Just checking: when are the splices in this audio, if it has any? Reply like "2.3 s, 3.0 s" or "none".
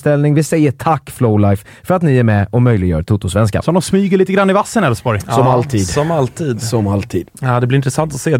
none